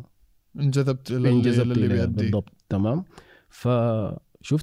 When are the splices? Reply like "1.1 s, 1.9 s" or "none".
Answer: none